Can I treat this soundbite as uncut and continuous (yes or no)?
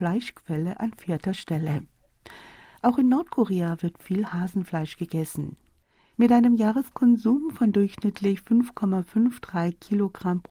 no